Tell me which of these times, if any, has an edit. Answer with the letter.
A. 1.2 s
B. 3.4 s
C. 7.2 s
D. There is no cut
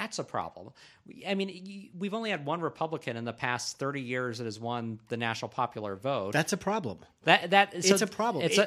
C